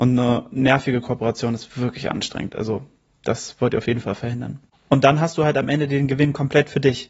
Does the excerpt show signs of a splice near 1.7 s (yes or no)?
no